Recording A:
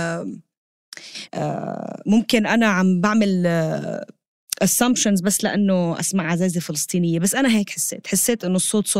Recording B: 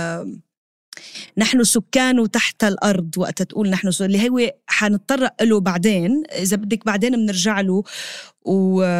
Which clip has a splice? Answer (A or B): A